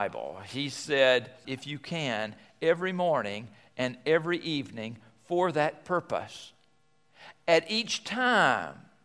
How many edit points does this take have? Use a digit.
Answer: 1